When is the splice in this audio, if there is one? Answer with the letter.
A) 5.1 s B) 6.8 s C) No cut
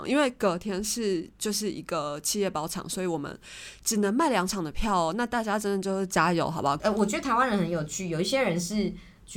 B